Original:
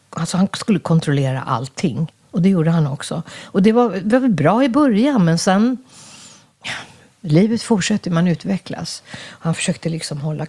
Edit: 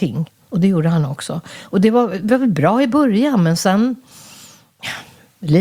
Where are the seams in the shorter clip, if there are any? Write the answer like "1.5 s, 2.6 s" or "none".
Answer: none